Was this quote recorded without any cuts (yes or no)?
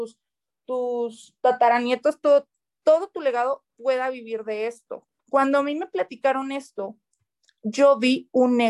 no